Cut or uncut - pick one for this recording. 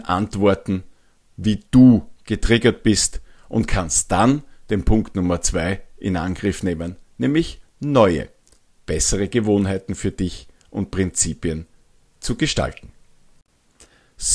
uncut